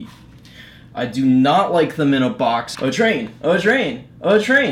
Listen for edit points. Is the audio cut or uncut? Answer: cut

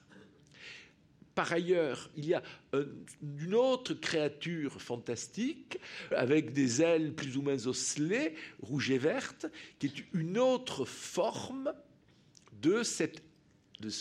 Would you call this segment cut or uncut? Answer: cut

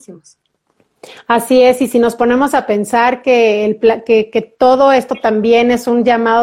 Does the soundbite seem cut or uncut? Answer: uncut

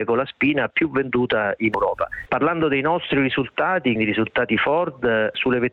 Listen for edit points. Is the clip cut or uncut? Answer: cut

